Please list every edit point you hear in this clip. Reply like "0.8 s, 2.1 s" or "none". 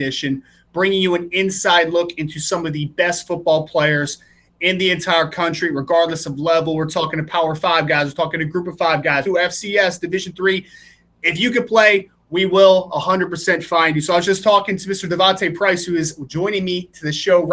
9.3 s